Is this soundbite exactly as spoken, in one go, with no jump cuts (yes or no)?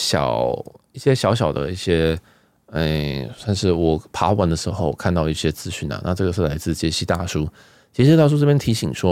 yes